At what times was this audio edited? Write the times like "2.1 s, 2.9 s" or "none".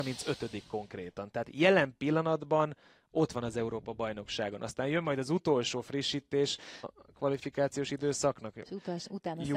6.8 s